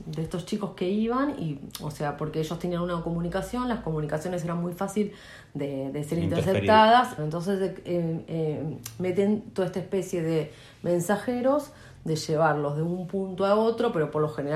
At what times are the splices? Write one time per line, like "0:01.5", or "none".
0:07.2